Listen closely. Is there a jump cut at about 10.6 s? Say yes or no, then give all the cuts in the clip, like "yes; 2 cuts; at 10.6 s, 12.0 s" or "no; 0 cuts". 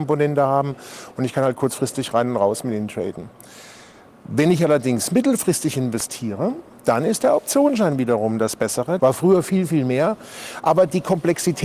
no; 1 cut; at 9.0 s